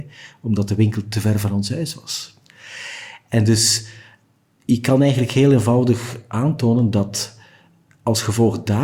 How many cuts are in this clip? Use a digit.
0